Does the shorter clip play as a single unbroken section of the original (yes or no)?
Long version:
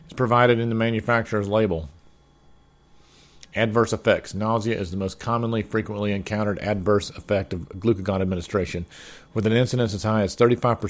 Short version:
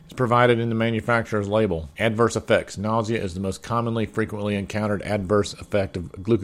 no